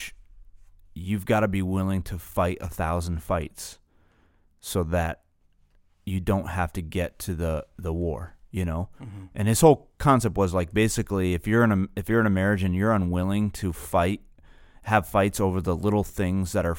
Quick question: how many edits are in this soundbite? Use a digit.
0